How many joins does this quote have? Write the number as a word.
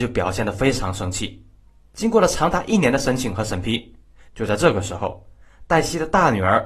two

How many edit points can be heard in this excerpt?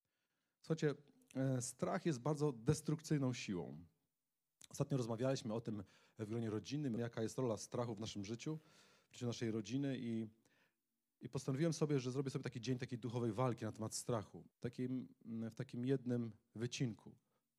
two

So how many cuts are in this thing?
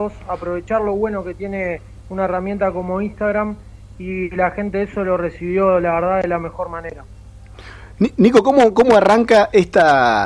zero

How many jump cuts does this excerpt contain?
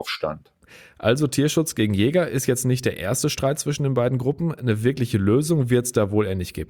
zero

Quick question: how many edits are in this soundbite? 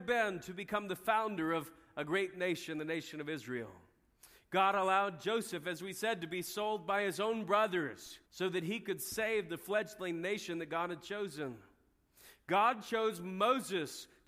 one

